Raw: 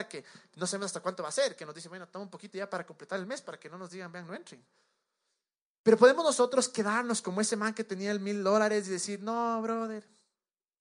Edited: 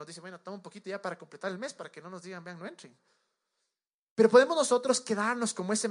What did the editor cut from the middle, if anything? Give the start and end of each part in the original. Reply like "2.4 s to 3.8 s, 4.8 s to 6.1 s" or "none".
none